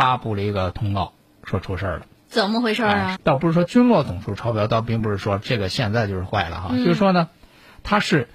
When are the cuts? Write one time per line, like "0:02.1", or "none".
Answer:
0:03.2